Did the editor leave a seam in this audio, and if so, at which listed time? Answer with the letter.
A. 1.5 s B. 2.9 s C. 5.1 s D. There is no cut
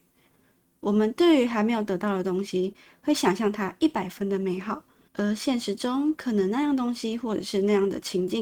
C